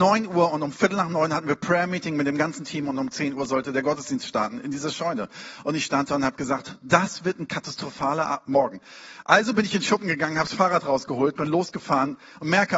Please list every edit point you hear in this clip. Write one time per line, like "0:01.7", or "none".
none